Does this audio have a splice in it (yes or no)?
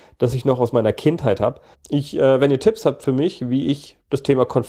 yes